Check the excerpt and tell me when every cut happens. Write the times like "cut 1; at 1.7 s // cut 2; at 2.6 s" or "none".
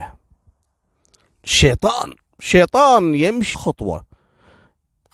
cut 1; at 3.5 s